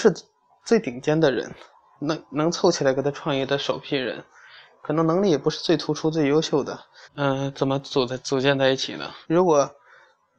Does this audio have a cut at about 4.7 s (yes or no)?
no